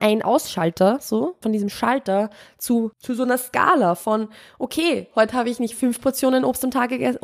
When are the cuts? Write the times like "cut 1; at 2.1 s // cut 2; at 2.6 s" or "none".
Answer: cut 1; at 1.4 s // cut 2; at 2.9 s